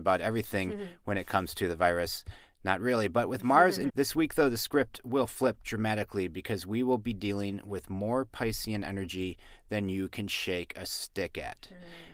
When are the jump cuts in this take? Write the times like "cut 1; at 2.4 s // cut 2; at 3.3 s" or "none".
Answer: cut 1; at 3.9 s